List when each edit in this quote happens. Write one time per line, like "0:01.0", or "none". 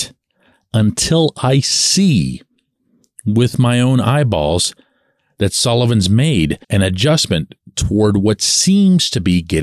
0:06.6